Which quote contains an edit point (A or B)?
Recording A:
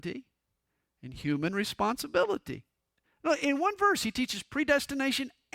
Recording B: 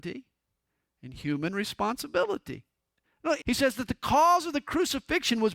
B